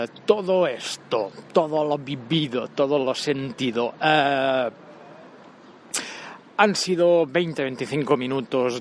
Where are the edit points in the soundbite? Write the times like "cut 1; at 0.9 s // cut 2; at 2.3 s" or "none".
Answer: none